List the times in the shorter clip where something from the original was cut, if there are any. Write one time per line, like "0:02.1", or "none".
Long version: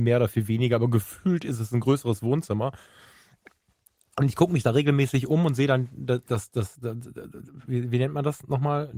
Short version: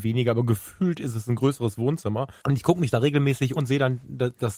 0:02.4
0:03.6